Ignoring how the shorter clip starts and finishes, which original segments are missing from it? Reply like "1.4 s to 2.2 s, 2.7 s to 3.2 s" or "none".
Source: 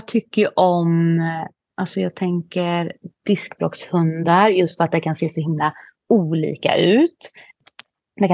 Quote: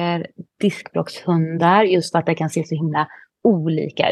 none